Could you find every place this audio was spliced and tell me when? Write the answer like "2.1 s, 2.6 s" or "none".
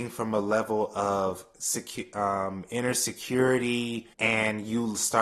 4.1 s

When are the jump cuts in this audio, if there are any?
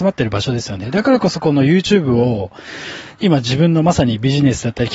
none

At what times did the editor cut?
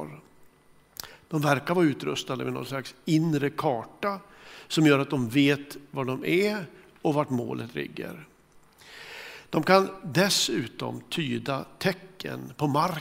none

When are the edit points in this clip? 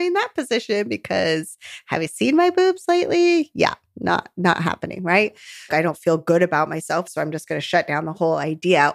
5.7 s, 7.1 s

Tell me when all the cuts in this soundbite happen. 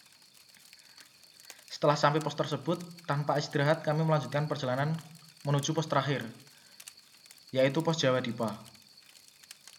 none

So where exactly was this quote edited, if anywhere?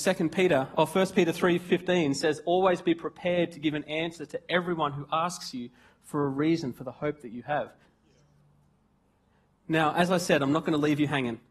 7.8 s

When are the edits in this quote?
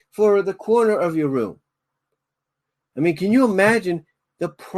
2.9 s

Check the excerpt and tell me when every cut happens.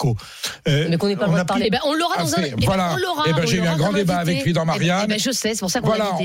1.6 s

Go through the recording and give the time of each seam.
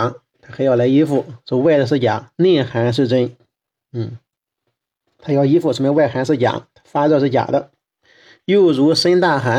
none

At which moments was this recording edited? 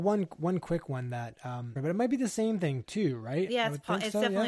1.8 s, 3.5 s

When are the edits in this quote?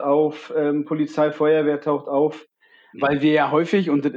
2.9 s

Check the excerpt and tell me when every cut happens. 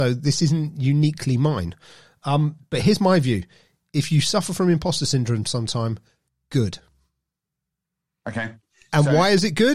none

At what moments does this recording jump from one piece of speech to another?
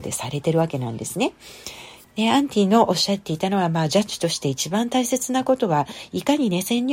2.0 s

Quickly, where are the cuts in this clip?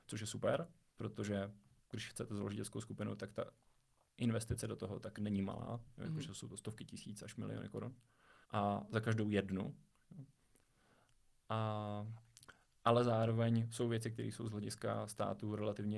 8.4 s

